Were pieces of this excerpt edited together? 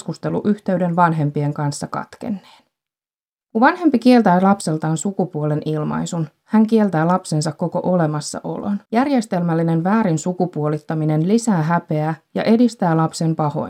yes; 2 cuts; at 3.4 s, 8.8 s

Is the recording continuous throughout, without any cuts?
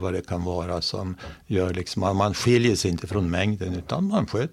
yes; 0 cuts

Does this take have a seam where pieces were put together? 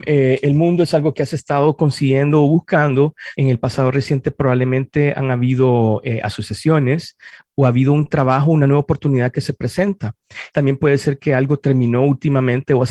yes; 2 cuts; at 3.3 s, 10.5 s

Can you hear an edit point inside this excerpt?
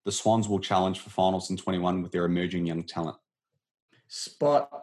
yes; 1 cut; at 3.9 s

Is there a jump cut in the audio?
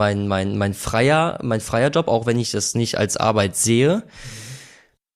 no; 0 cuts

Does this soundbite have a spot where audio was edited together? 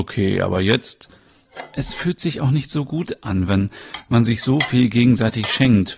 no; 0 cuts

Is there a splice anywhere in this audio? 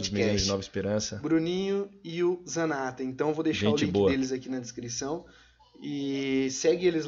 no; 0 cuts

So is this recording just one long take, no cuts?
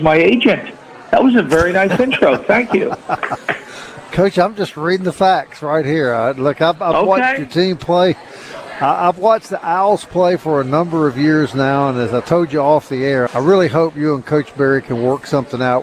no; 1 cut; at 13.3 s

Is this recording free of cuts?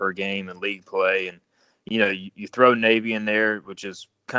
yes; 0 cuts

